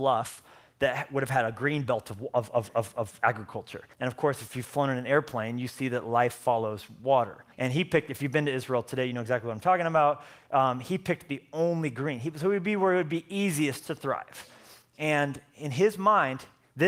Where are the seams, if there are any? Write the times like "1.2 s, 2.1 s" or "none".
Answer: 3.9 s, 7.5 s